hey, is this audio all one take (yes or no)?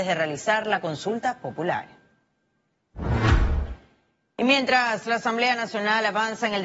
yes